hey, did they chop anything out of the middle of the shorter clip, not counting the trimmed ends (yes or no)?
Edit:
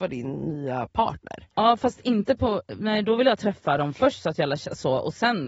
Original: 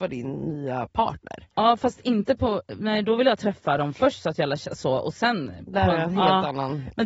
no